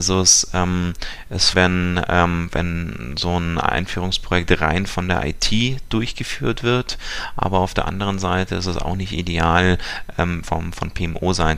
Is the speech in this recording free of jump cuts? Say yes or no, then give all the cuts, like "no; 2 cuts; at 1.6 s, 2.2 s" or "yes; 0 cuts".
no; 2 cuts; at 1.5 s, 10.4 s